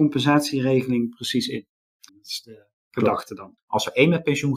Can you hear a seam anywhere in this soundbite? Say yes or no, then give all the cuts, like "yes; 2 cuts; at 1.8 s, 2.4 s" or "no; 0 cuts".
yes; 2 cuts; at 2.1 s, 3.6 s